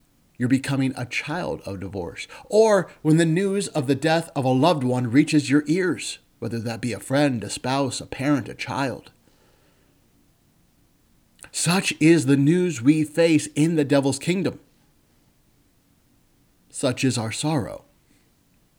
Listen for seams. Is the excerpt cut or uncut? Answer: uncut